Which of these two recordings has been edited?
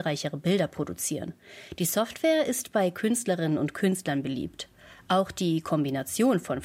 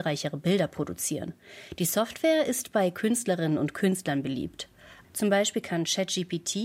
second; 1 cut; at 5.0 s

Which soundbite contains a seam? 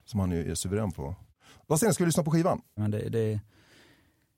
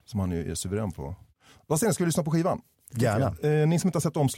first; 1 cut; at 2.8 s

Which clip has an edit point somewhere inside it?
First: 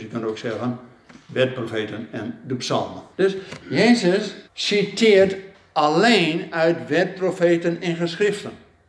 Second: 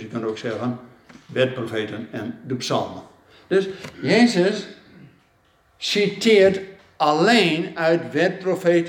first; 2 cuts; at 3.1 s, 4.5 s

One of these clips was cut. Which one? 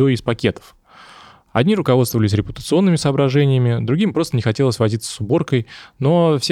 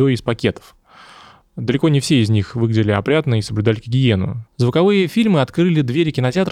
second; 2 cuts; at 1.4 s, 4.5 s

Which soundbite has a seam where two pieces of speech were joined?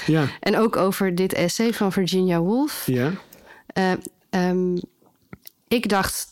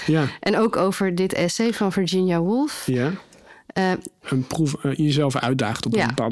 second; 1 cut; at 4.2 s

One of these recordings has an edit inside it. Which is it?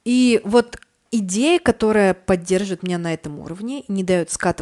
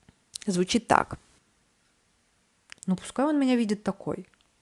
second; 1 cut; at 2.8 s

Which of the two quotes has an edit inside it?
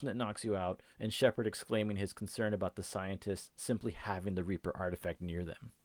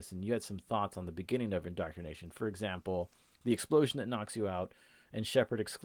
first; 1 cut; at 0.9 s

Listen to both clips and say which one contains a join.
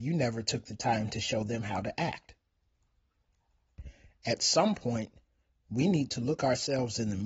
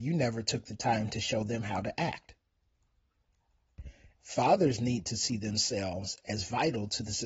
second; 1 cut; at 4.2 s

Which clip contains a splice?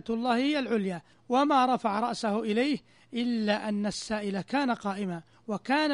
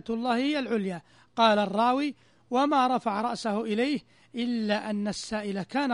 first; 1 cut; at 1.1 s

